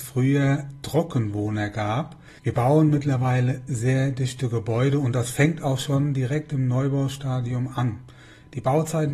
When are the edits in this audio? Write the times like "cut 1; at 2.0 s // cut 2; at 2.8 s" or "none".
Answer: cut 1; at 2.4 s